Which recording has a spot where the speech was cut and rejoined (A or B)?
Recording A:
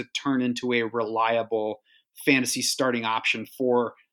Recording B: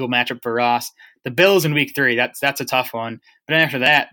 B